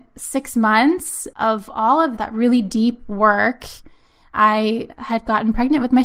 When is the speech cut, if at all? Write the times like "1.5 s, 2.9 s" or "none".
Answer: 2.2 s

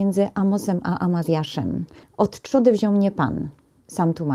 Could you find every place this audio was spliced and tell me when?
2.0 s

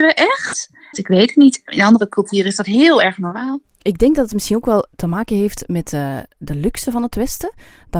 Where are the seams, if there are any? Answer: 0.9 s

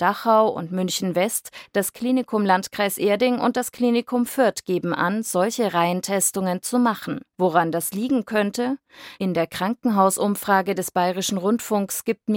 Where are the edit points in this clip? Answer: 7.3 s, 9.2 s

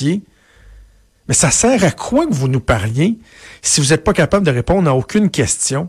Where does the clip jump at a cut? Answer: none

